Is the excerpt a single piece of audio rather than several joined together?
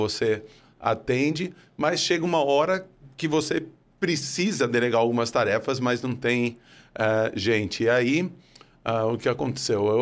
yes; 0 cuts

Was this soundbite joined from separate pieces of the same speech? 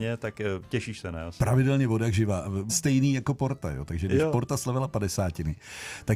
yes; 1 cut; at 2.7 s

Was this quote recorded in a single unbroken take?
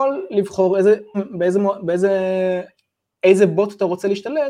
no; 1 cut; at 1.1 s

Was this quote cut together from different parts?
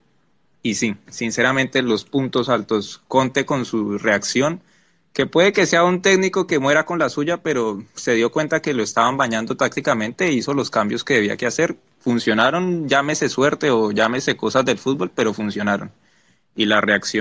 no; 0 cuts

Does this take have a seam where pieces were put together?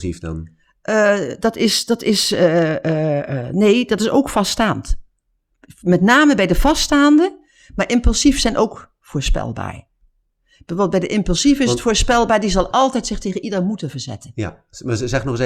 no; 0 cuts

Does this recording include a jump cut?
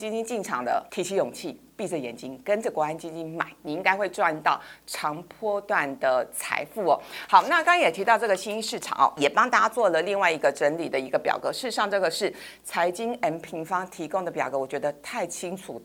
no; 0 cuts

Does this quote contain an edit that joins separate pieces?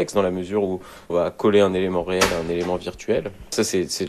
yes; 1 cut; at 1.1 s

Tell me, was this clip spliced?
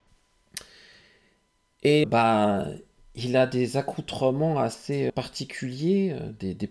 yes; 2 cuts; at 2.0 s, 5.1 s

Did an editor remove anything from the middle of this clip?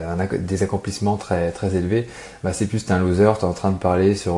no; 0 cuts

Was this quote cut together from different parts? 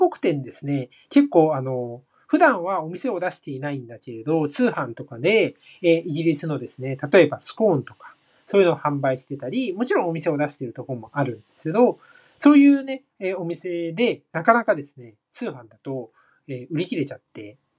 no; 0 cuts

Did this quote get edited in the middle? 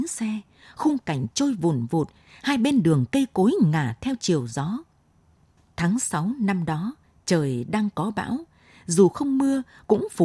no; 0 cuts

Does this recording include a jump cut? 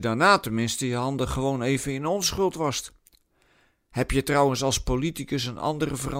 no; 0 cuts

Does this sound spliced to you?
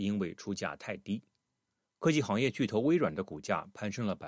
yes; 1 cut; at 1.8 s

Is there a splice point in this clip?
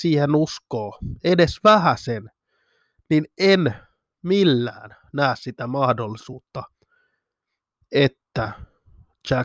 no; 0 cuts

